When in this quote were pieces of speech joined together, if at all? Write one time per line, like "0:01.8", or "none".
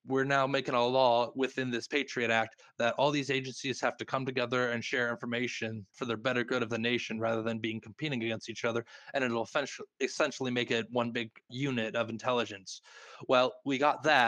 0:05.9
0:11.5